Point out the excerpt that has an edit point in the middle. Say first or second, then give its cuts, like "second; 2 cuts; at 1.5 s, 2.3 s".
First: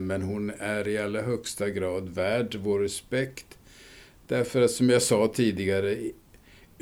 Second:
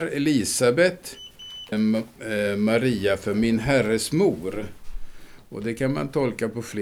second; 1 cut; at 1.7 s